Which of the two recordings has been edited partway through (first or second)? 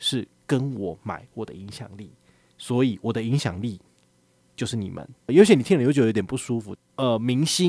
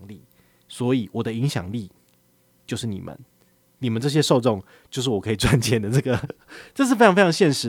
first